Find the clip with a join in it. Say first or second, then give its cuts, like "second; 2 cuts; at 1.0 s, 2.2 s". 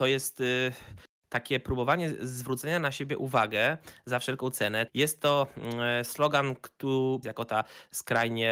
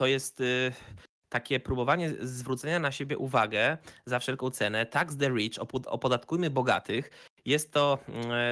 first; 2 cuts; at 4.9 s, 7.2 s